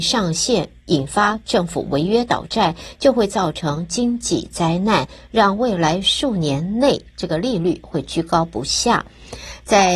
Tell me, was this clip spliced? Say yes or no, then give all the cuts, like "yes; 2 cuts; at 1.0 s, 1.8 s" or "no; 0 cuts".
no; 0 cuts